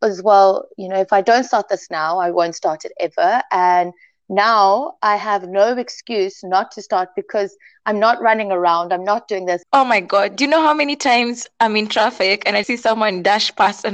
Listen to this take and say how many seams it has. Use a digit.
2